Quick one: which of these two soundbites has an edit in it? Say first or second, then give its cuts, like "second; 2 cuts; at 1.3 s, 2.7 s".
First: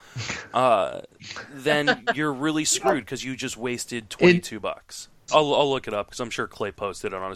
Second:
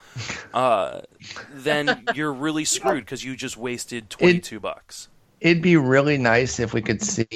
first; 1 cut; at 5.3 s